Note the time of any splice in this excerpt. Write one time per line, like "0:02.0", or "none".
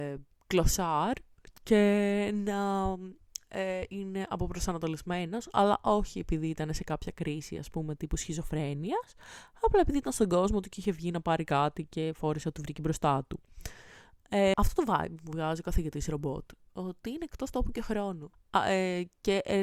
0:14.5
0:18.3